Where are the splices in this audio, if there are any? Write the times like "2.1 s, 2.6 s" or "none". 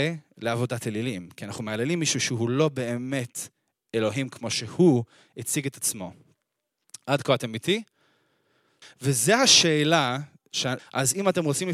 8.8 s, 10.8 s